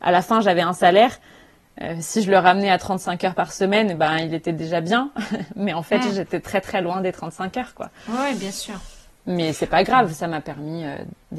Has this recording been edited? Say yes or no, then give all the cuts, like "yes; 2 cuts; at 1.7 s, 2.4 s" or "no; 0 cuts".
no; 0 cuts